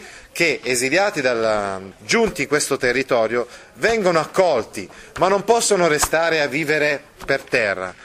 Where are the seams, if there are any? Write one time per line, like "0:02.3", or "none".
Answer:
0:01.9